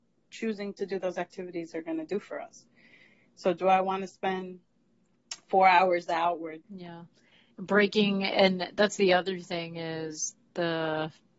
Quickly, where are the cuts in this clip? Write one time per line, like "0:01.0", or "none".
0:06.6